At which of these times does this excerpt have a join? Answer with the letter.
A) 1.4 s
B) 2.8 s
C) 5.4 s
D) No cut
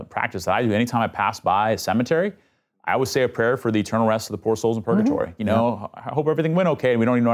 C